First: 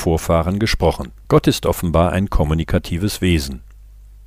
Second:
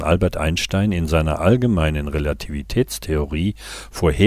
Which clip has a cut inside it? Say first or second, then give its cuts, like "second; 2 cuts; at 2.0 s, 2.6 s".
first; 1 cut; at 1.2 s